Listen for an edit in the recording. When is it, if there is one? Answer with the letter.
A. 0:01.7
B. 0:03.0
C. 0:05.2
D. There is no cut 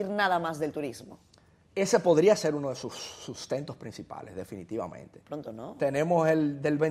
C